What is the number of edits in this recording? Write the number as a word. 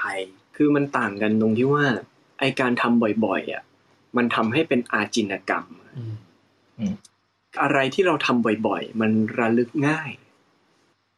one